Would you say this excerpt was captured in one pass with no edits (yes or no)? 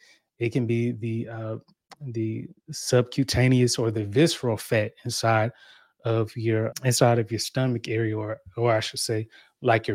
no